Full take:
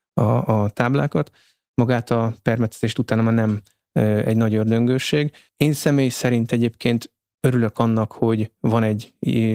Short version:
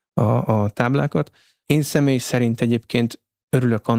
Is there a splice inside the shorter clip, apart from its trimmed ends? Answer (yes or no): yes